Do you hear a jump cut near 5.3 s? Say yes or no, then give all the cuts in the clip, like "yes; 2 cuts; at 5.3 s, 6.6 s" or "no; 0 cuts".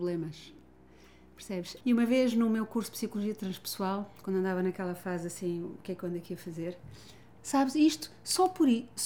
no; 2 cuts; at 1.8 s, 7.4 s